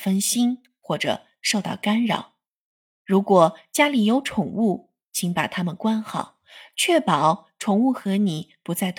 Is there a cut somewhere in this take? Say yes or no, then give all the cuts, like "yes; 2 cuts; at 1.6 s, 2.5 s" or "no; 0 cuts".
no; 0 cuts